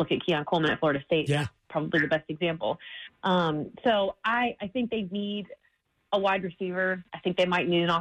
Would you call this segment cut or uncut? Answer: uncut